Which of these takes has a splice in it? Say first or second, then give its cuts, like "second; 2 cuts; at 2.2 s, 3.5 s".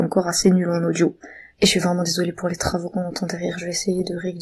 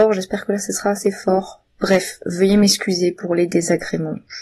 first; 1 cut; at 1.5 s